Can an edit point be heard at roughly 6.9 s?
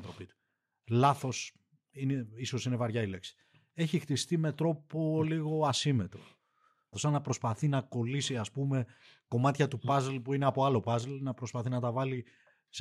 yes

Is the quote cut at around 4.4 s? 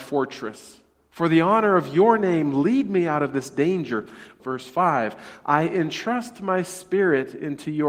yes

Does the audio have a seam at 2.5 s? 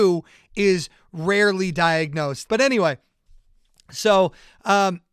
yes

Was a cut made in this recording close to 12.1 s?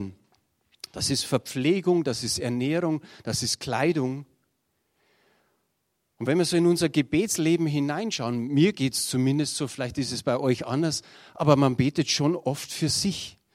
no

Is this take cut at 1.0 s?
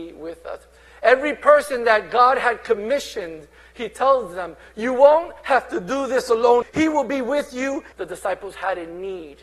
no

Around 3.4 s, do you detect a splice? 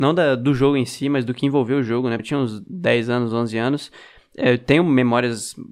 no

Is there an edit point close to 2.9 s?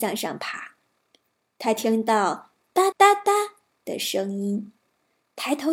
yes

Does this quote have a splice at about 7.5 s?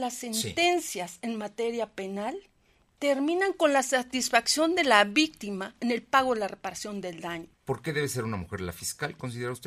yes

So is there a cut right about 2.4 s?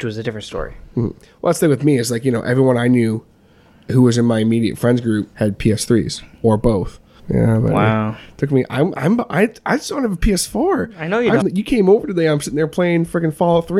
no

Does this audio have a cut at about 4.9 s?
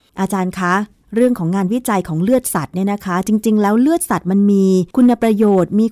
yes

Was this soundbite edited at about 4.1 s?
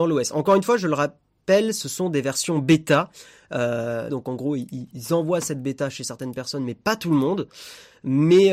yes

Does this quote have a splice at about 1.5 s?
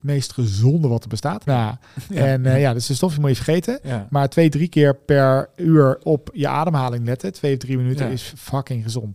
yes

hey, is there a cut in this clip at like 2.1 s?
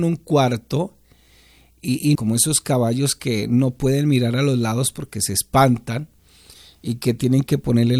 yes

